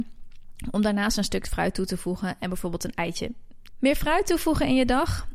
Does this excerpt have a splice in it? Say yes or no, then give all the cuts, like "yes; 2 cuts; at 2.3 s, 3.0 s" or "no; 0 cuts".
yes; 1 cut; at 3.7 s